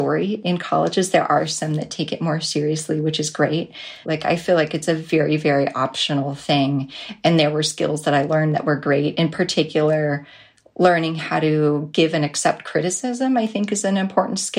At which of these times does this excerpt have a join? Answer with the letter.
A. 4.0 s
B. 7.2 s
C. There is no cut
A